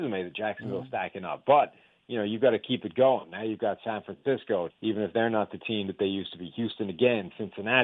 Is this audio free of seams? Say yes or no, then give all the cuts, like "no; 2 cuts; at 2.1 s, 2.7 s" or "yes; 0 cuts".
no; 1 cut; at 4.7 s